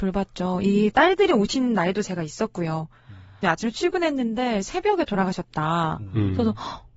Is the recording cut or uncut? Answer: cut